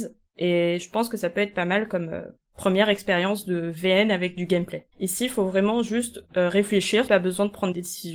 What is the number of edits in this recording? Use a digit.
2